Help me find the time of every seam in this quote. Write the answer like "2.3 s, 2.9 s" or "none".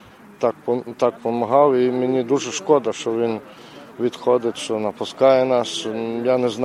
none